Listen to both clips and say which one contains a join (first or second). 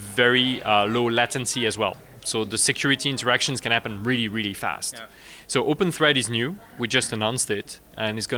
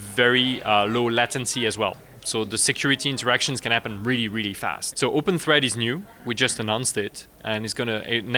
second